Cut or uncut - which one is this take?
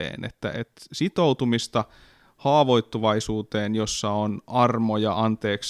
uncut